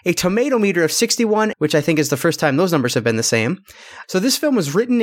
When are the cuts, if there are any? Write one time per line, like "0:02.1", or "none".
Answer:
0:01.5
0:04.0